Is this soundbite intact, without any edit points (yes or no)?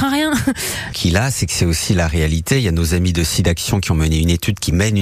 no